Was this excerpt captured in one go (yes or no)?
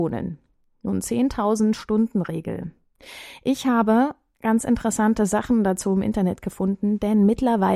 yes